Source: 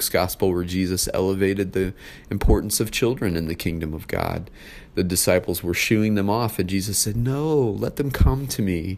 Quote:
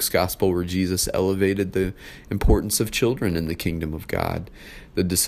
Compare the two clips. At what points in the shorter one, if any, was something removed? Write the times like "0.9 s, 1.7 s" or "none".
none